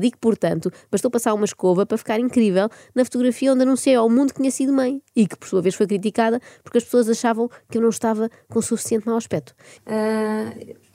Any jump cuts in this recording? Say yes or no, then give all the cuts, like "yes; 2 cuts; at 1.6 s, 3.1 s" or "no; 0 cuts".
yes; 1 cut; at 9.8 s